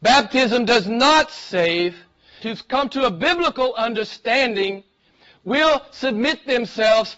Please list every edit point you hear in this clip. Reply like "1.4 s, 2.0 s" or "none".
2.4 s